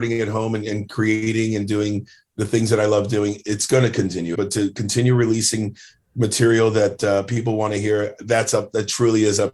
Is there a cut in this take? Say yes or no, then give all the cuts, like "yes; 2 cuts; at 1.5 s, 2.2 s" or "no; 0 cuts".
yes; 1 cut; at 4.3 s